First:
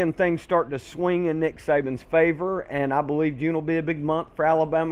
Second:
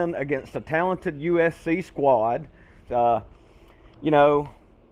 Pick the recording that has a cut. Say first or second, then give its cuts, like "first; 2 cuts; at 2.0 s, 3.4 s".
second; 1 cut; at 2.9 s